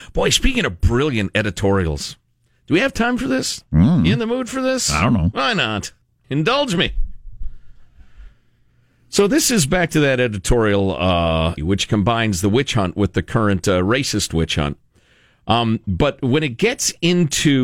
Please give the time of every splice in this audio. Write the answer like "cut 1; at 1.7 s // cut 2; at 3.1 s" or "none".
cut 1; at 6.2 s // cut 2; at 11.6 s